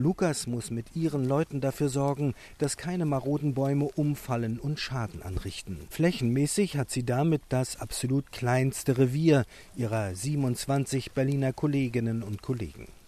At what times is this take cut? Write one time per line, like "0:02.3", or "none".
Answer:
0:05.9
0:07.4